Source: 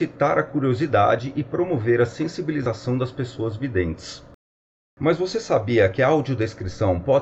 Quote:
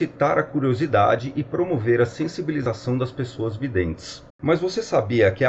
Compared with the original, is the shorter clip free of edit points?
no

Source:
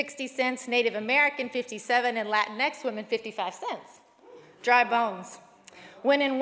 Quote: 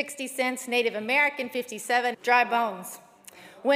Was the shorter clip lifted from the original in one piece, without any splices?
no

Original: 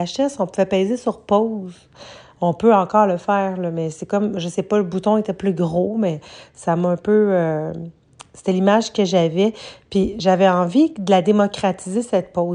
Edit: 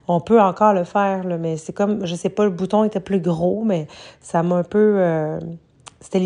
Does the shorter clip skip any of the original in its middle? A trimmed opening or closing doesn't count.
no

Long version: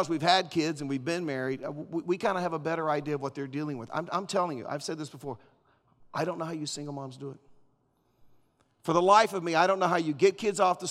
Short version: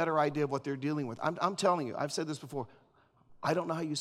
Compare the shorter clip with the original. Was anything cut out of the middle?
no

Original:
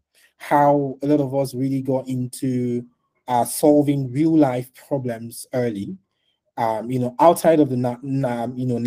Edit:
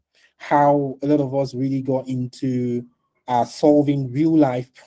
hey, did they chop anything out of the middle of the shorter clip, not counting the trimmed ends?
no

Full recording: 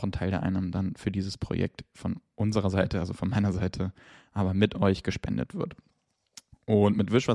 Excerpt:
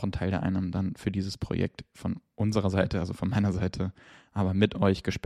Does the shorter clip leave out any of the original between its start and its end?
no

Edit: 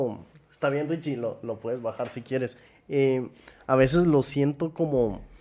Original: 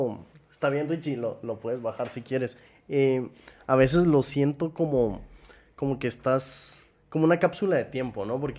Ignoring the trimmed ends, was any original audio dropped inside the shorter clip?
no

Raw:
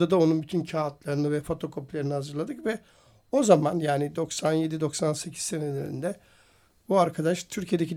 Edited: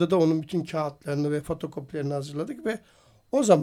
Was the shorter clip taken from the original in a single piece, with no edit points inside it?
yes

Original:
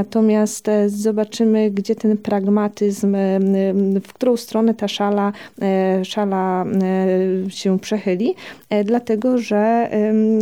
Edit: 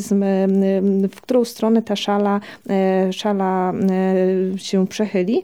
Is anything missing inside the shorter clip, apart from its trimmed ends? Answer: no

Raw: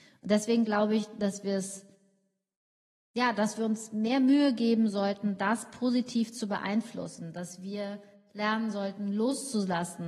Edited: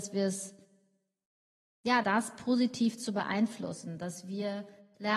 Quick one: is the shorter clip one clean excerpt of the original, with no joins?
no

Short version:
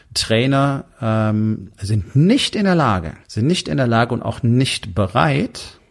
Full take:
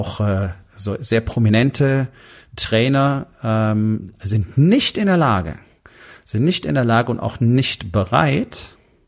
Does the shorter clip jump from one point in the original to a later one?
yes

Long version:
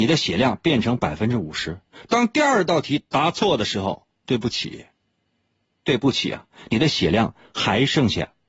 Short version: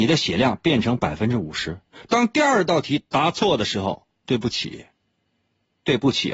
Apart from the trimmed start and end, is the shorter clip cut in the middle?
no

